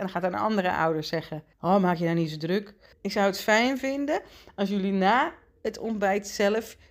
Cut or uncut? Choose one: cut